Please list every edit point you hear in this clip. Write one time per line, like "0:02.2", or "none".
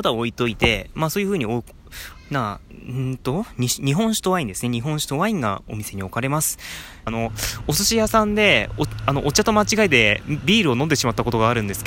0:07.1